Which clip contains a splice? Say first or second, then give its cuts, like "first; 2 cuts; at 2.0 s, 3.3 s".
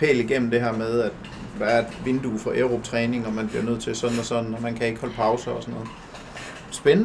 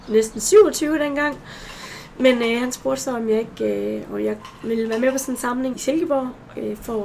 second; 1 cut; at 5.7 s